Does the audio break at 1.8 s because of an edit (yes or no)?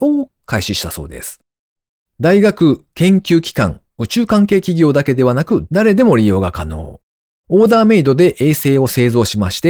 no